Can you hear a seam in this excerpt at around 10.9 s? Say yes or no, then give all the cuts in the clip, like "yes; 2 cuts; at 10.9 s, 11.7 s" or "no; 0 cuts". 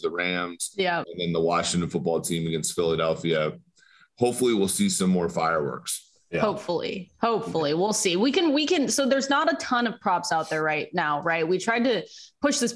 no; 1 cut; at 1.0 s